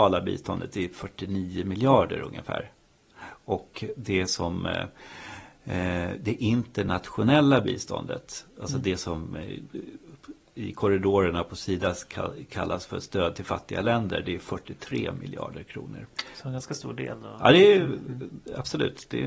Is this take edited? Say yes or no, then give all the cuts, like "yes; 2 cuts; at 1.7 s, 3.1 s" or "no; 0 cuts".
no; 0 cuts